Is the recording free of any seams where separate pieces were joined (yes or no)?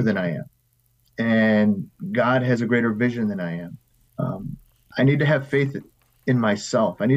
no